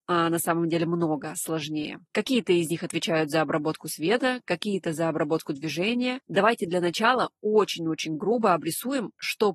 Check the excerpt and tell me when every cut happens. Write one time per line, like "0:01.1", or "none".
0:02.1
0:06.2